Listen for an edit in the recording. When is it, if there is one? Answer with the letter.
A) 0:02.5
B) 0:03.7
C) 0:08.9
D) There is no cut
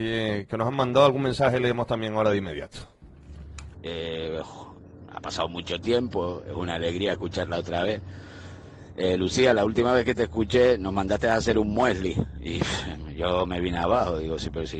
B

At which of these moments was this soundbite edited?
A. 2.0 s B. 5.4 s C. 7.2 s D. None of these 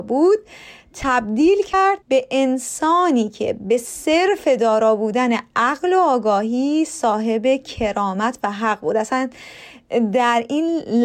A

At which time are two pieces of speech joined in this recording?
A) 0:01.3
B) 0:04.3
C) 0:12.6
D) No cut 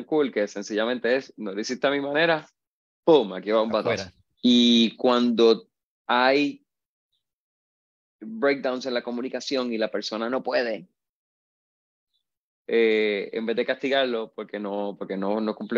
B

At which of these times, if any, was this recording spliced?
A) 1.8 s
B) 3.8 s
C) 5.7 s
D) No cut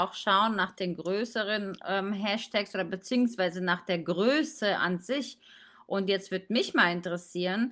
D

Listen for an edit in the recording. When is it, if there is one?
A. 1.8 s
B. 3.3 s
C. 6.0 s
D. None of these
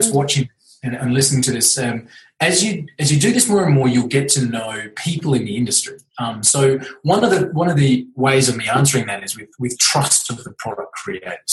D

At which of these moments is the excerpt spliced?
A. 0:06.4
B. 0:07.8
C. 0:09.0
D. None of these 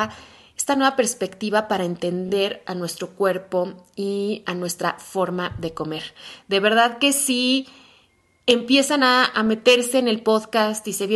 D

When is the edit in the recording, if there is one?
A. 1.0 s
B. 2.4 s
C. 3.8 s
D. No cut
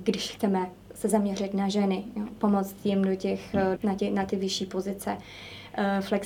C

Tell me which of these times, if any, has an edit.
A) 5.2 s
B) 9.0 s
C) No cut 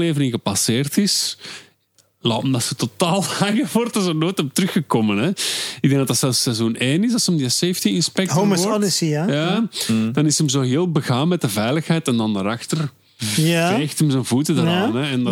C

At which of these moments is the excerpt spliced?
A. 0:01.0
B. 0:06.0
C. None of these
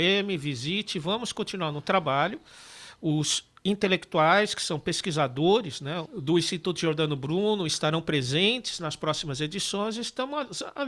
B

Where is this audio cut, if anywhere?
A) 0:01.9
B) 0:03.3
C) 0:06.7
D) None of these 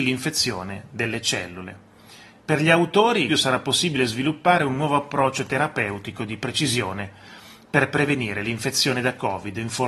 B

